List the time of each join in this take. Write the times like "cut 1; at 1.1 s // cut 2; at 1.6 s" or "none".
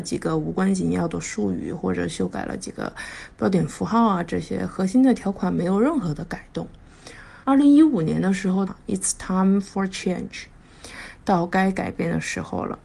cut 1; at 7.4 s // cut 2; at 8.7 s